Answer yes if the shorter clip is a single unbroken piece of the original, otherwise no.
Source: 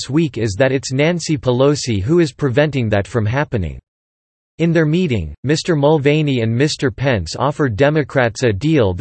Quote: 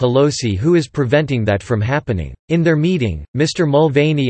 no